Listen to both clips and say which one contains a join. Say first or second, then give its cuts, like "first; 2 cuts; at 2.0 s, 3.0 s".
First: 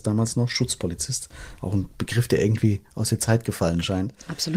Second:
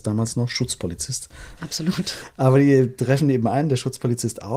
second; 1 cut; at 1.6 s